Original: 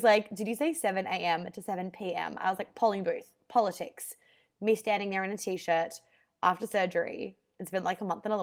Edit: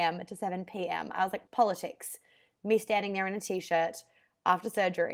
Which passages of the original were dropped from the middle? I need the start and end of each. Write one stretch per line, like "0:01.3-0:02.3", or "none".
0:02.7-0:03.4